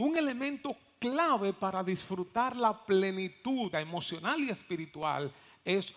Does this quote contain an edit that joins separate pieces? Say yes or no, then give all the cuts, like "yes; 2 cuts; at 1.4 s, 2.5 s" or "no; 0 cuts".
yes; 1 cut; at 3.7 s